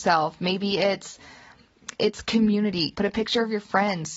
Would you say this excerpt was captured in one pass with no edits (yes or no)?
no